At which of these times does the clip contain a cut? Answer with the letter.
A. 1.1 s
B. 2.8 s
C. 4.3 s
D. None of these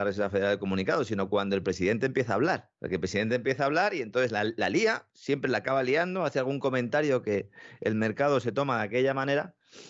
B